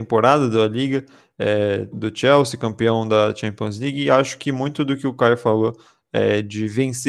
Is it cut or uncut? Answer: cut